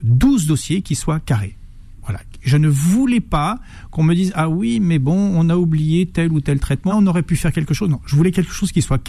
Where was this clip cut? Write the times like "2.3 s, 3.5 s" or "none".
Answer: 6.9 s